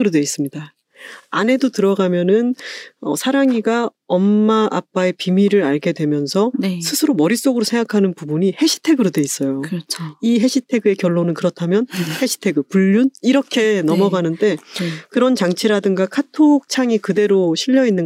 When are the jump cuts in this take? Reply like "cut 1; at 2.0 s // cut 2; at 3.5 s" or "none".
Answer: none